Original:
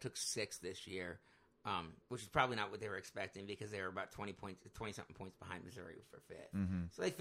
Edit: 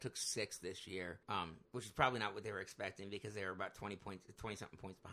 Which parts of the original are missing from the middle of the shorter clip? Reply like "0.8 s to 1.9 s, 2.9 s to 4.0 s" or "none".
1.2 s to 1.6 s